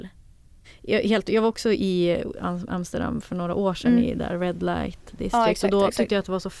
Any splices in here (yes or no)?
no